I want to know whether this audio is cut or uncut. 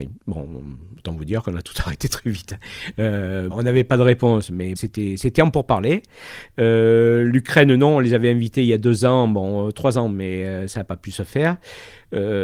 cut